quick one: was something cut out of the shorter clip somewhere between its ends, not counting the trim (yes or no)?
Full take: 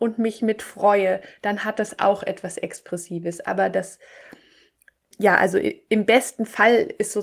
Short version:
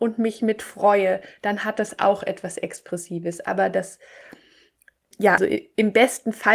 yes